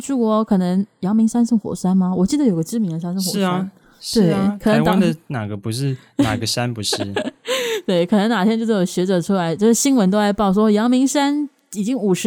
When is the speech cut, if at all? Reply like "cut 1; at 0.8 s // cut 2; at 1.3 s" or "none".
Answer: none